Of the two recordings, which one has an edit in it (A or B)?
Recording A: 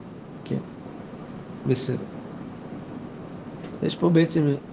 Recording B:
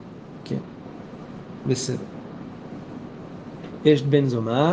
B